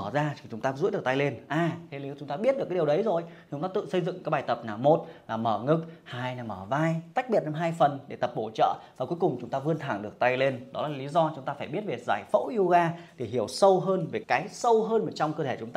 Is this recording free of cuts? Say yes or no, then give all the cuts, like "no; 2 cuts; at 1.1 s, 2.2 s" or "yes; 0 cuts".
no; 1 cut; at 14.2 s